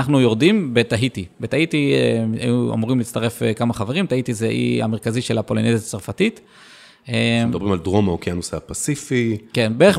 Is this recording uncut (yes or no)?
yes